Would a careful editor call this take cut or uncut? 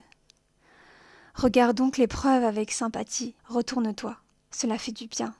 cut